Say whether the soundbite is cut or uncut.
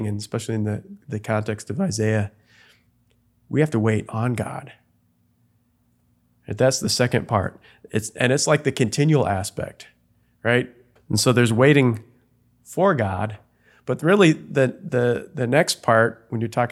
cut